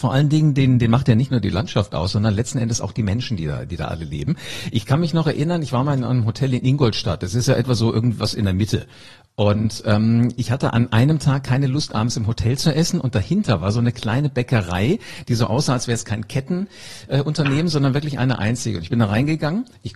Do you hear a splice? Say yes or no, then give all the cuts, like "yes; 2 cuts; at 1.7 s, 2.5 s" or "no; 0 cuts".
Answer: no; 0 cuts